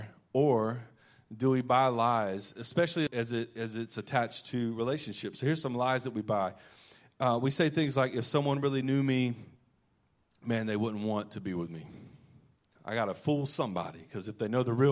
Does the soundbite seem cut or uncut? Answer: cut